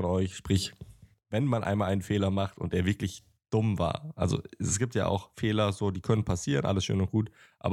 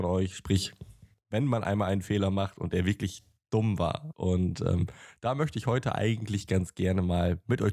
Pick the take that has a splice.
second; 1 cut; at 4.1 s

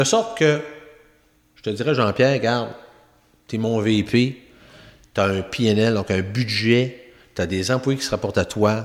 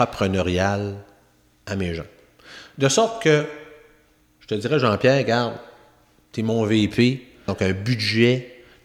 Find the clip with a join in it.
second; 1 cut; at 7.5 s

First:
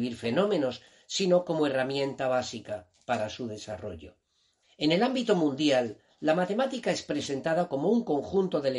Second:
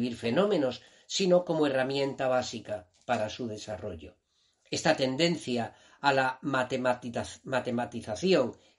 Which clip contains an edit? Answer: first; 1 cut; at 4.6 s

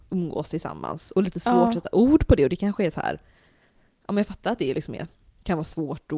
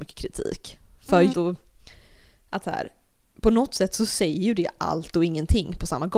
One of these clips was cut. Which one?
second; 1 cut; at 1.3 s

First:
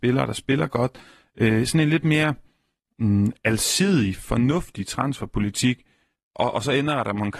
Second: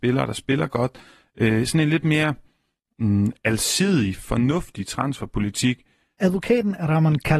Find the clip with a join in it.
second; 1 cut; at 6.2 s

